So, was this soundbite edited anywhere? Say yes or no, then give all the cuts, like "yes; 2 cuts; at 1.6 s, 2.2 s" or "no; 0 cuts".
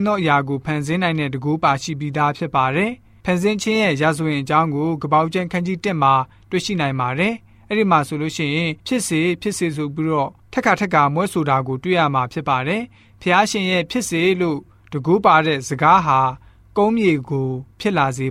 yes; 1 cut; at 8.8 s